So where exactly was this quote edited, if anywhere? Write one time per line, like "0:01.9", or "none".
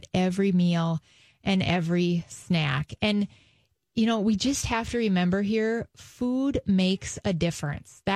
none